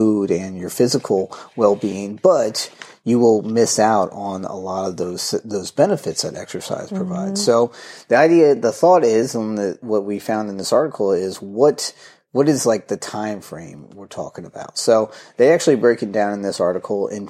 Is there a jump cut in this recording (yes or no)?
no